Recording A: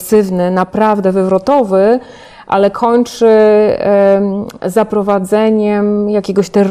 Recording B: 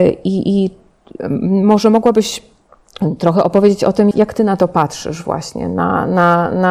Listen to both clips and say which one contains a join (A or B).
B